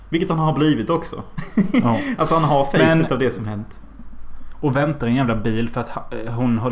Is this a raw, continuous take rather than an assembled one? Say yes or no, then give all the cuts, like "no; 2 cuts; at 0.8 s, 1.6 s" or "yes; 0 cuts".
no; 1 cut; at 4.5 s